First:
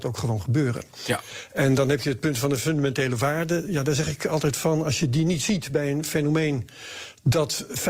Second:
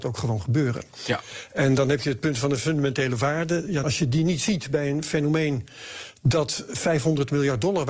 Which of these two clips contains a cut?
second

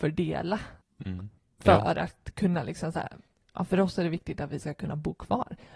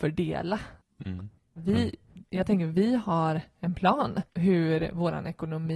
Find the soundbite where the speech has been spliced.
second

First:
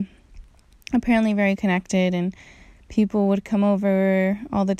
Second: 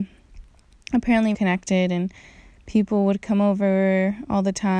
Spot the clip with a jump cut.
second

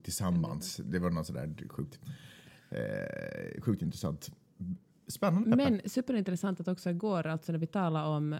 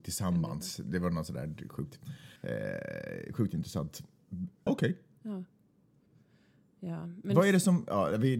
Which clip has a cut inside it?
second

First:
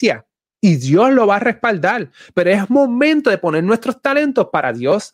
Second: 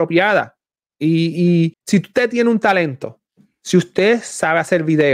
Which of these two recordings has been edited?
second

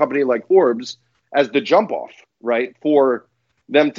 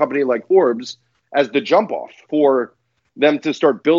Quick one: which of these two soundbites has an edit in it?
second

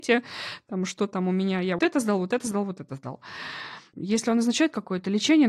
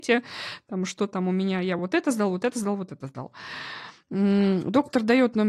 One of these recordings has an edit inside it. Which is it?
first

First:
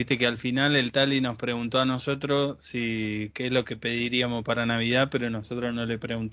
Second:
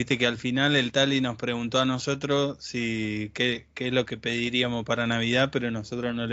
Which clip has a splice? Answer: first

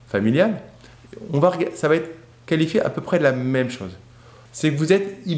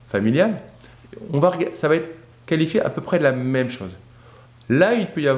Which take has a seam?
first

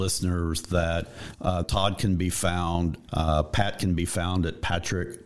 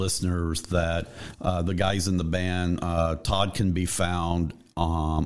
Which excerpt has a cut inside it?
first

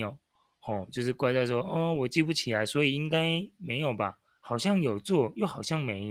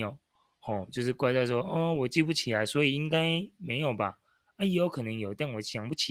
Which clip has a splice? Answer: first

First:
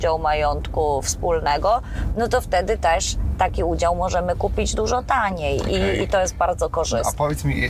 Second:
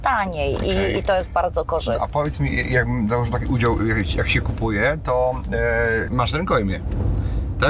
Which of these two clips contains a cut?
second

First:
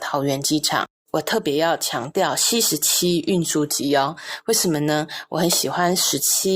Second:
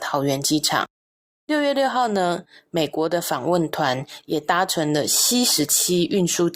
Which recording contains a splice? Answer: first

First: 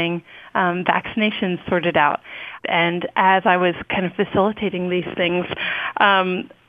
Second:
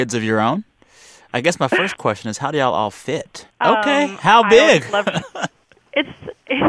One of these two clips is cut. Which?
second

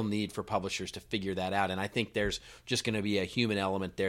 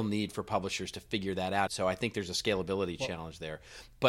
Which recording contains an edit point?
second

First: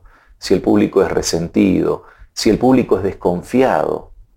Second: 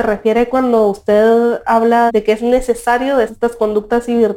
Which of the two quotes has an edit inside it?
second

